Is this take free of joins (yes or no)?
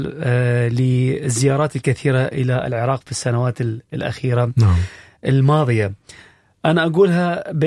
yes